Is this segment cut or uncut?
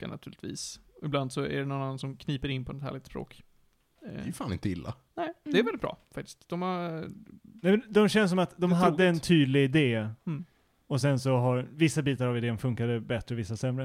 uncut